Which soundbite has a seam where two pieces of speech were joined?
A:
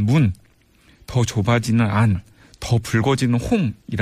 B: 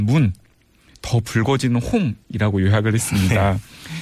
B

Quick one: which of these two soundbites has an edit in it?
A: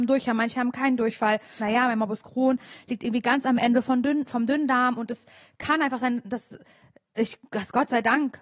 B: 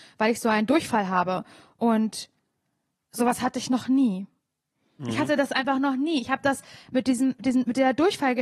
A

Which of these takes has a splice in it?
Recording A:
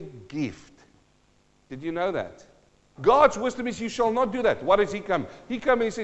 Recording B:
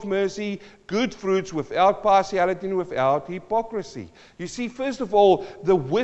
A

